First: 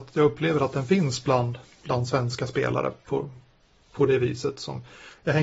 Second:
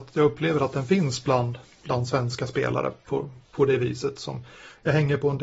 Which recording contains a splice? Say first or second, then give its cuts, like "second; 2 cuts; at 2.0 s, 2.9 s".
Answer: second; 1 cut; at 3.4 s